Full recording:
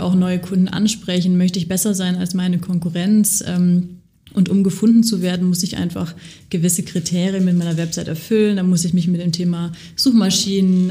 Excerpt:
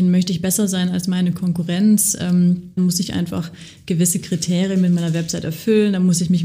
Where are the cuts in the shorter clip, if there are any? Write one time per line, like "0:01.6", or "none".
0:02.8